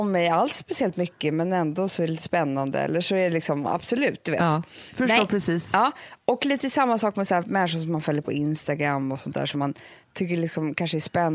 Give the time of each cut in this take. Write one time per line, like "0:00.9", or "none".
0:03.6